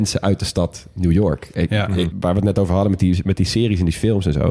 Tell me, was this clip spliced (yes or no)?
yes